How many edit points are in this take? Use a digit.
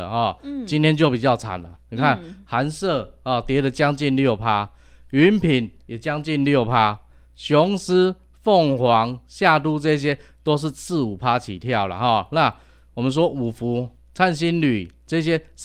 0